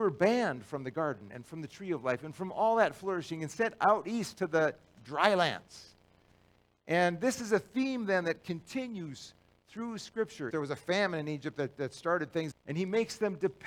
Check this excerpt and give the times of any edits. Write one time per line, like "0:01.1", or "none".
0:10.5
0:12.5